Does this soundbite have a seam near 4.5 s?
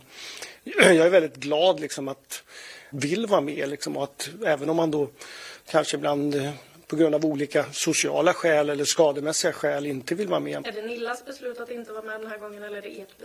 no; 2 cuts; at 2.9 s, 10.6 s

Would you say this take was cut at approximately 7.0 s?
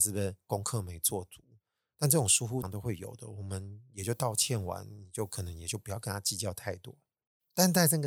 no; 1 cut; at 2.6 s

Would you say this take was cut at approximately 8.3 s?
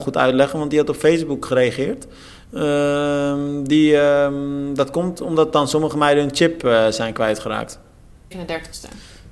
yes; 1 cut; at 8.3 s

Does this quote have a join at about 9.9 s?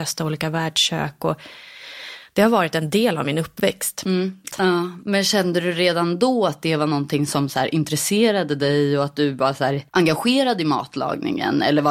yes; 2 cuts; at 4.5 s, 9.9 s

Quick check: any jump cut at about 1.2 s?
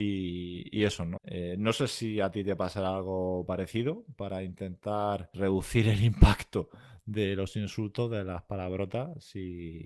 yes; 1 cut; at 1.2 s

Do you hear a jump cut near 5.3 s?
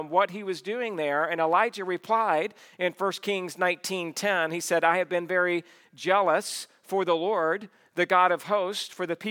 no; 0 cuts

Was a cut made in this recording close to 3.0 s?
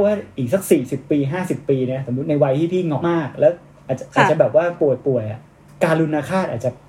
yes; 1 cut; at 3.0 s

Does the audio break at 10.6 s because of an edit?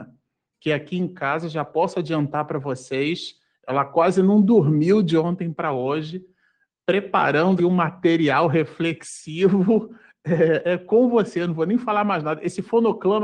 yes; 2 cuts; at 7.6 s, 10.6 s

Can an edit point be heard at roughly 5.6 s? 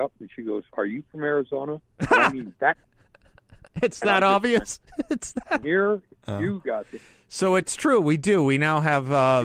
yes; 1 cut; at 5.6 s

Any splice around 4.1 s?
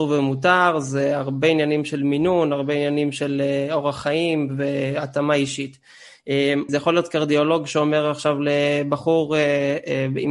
no; 1 cut; at 6.7 s

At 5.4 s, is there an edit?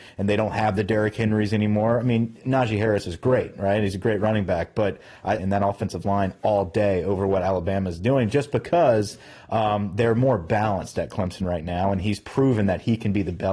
yes; 1 cut; at 5.4 s

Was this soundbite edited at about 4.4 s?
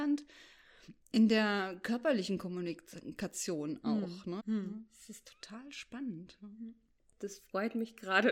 yes; 1 cut; at 4.4 s

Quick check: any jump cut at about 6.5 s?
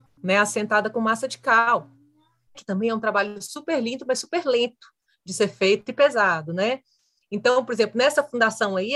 no; 1 cut; at 2.5 s

